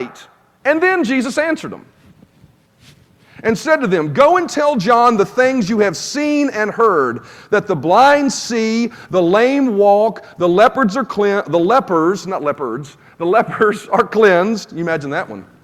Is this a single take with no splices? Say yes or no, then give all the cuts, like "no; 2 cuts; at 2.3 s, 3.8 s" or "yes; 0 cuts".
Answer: yes; 0 cuts